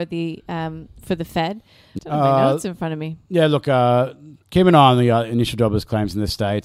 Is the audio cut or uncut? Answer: cut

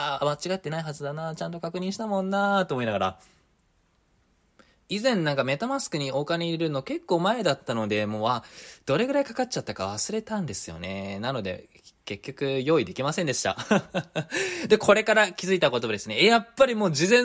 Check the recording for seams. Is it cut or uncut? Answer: uncut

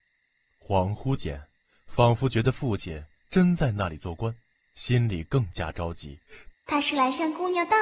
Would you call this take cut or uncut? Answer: cut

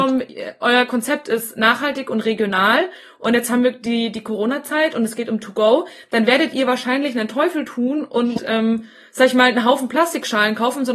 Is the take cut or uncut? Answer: uncut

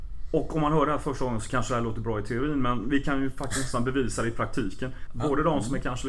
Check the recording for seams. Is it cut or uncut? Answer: cut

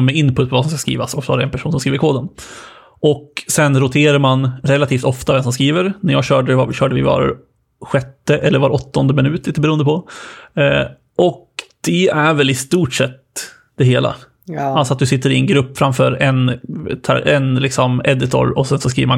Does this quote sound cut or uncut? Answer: uncut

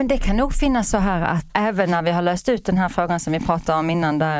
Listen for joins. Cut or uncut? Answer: cut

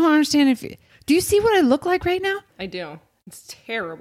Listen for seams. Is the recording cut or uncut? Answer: cut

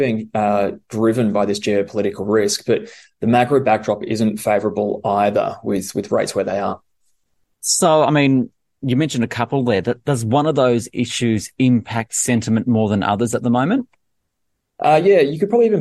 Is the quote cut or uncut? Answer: uncut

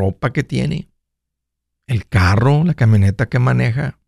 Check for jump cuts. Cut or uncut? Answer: uncut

